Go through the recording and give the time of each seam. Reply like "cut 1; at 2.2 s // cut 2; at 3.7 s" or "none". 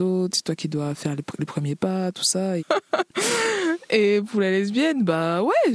cut 1; at 2.6 s

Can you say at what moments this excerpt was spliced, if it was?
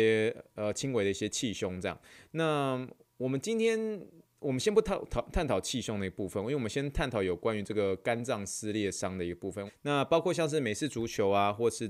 cut 1; at 9.7 s

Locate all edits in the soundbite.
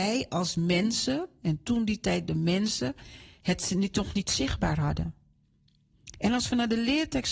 none

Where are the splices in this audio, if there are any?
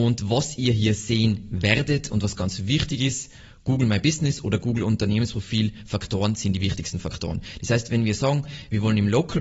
none

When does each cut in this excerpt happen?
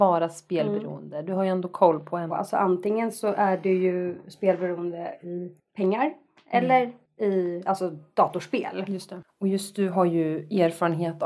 cut 1; at 2.3 s // cut 2; at 9.2 s

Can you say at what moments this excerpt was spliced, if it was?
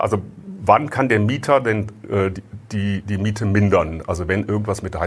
none

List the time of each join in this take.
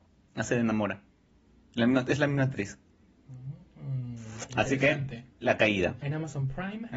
cut 1; at 6.0 s

